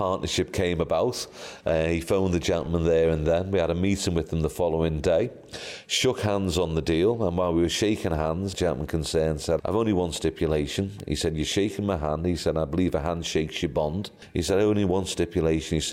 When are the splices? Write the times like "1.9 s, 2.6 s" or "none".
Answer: 9.6 s